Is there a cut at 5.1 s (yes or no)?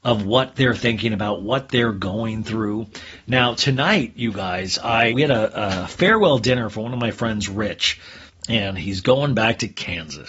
yes